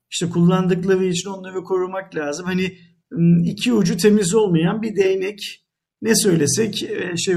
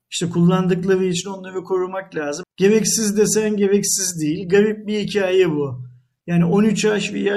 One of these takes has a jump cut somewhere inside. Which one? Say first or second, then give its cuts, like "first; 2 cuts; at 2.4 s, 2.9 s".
second; 1 cut; at 2.4 s